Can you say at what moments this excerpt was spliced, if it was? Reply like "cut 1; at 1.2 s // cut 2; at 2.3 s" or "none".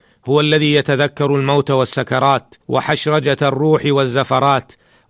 cut 1; at 2.6 s